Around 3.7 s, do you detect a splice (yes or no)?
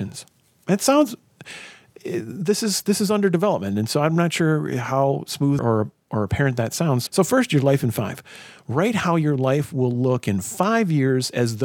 no